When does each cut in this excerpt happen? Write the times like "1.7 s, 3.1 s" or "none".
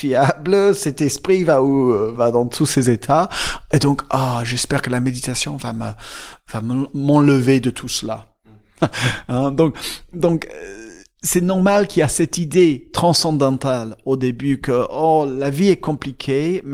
2.1 s, 8.8 s

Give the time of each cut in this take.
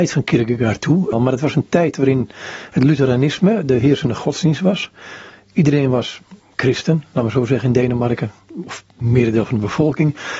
1.1 s

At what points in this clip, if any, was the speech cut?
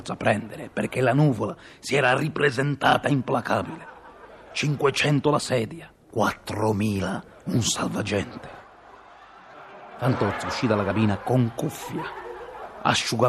6.0 s

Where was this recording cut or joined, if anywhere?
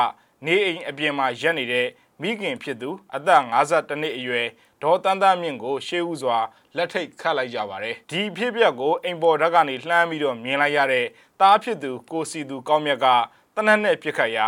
8.0 s

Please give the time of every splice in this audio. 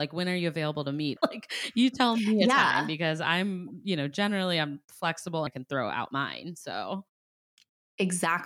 1.2 s, 5.5 s

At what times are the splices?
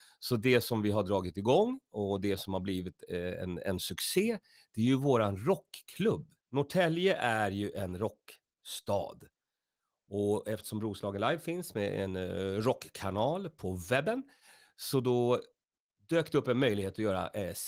6.4 s

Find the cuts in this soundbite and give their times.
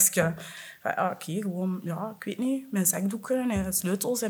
none

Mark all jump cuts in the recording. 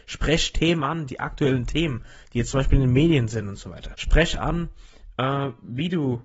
1.1 s, 3.9 s

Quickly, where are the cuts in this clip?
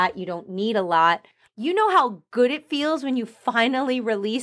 1.4 s

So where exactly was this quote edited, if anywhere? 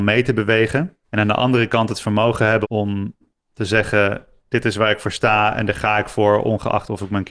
1.0 s, 2.6 s

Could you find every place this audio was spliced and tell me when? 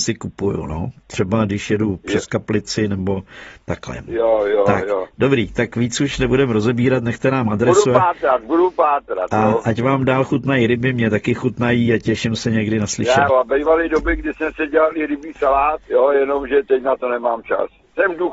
13.3 s, 15.8 s

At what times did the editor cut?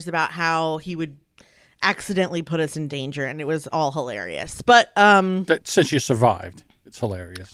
none

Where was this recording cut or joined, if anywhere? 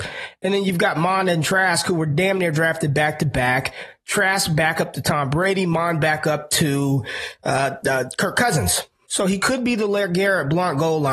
7.8 s, 9.1 s

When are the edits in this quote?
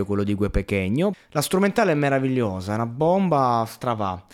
1.1 s

